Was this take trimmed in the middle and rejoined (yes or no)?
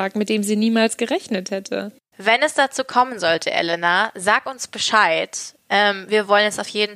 no